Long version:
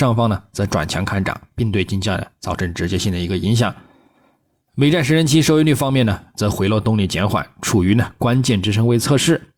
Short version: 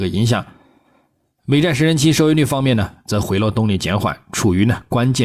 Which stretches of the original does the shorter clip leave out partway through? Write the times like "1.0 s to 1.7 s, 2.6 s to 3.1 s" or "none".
none